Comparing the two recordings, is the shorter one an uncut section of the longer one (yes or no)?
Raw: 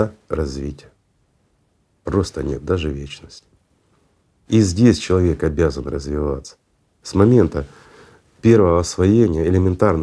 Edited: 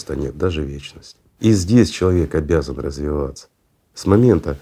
no